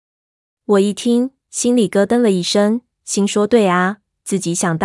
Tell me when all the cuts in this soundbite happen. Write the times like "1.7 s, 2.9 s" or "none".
none

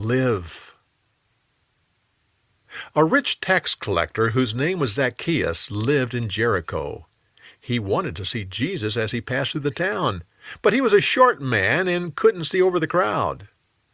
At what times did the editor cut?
none

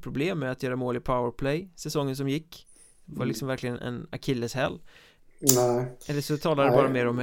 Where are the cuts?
3.8 s, 5.2 s

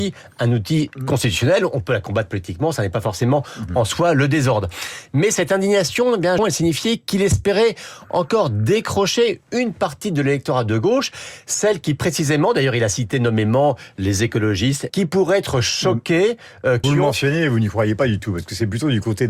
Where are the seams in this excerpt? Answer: 6.4 s, 14.9 s, 16.8 s

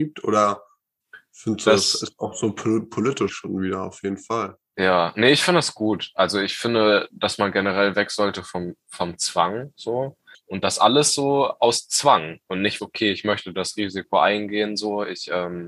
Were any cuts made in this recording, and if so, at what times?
3.3 s, 10.3 s, 12.8 s

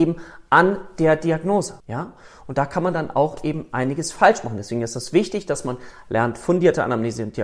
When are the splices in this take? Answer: 1.8 s

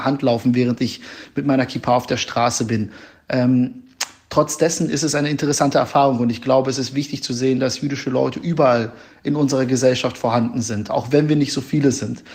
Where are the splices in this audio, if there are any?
none

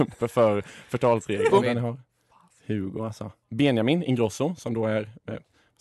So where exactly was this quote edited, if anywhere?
1.5 s, 3.4 s

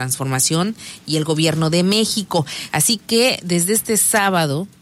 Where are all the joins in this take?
2.7 s

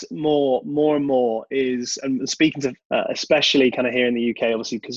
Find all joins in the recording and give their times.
2.8 s

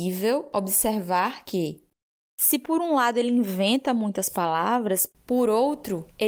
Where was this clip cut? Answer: none

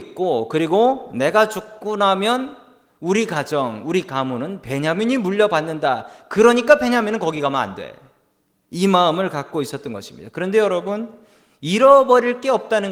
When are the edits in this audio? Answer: 10.3 s

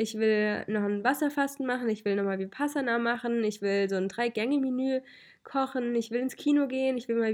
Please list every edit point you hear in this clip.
none

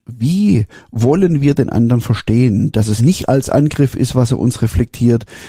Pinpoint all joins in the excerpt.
3.0 s

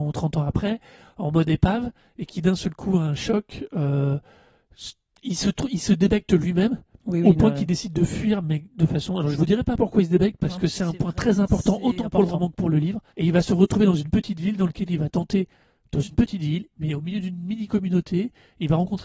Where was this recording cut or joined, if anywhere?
13.1 s, 16.7 s

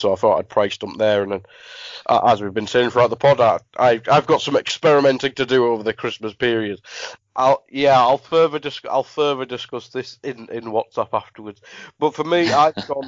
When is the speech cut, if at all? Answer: 7.2 s

